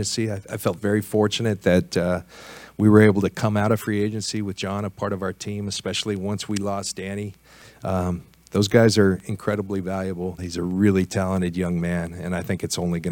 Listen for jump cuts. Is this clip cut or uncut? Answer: cut